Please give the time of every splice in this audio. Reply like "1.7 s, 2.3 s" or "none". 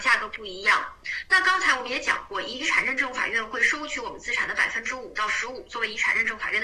1.2 s